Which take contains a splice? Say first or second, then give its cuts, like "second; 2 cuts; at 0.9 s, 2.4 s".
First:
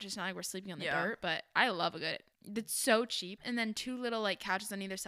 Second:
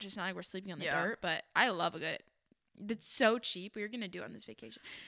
first; 2 cuts; at 2.3 s, 3.4 s